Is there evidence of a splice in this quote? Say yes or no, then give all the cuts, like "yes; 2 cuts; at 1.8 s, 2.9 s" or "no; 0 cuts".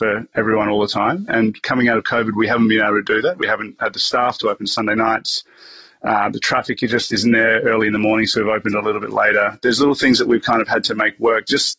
no; 0 cuts